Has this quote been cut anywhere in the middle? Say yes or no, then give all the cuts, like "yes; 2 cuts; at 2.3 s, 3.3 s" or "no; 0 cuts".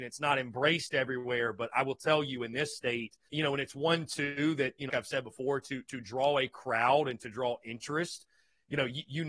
yes; 2 cuts; at 3.3 s, 4.9 s